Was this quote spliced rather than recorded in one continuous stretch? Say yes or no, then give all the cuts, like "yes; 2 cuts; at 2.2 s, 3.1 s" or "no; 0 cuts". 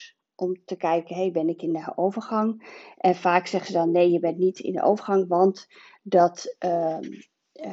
no; 0 cuts